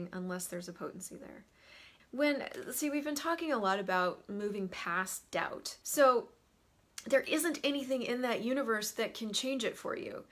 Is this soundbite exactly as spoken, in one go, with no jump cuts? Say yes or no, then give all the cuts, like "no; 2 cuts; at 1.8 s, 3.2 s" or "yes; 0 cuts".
no; 2 cuts; at 2.0 s, 5.8 s